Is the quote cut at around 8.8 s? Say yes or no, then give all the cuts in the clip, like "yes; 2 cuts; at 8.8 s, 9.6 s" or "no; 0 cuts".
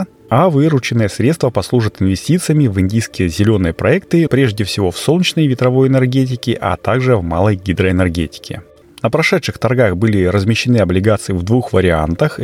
yes; 2 cuts; at 4.3 s, 8.8 s